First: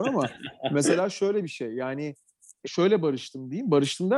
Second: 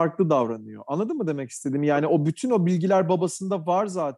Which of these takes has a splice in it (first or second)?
first